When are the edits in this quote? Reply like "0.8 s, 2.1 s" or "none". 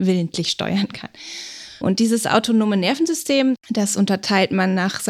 1.8 s